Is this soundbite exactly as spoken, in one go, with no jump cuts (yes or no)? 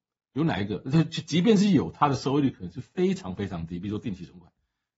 yes